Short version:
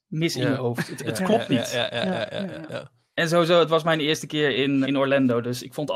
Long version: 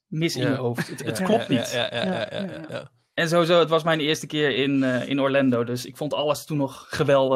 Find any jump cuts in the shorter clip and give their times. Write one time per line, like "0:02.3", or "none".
0:04.8